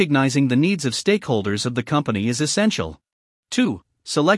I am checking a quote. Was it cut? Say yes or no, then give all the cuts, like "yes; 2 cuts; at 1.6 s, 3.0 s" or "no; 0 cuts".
yes; 1 cut; at 3.4 s